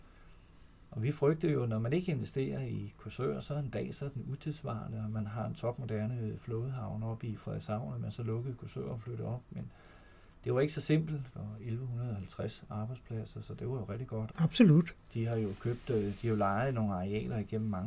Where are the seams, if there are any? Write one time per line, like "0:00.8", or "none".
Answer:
0:11.3
0:14.3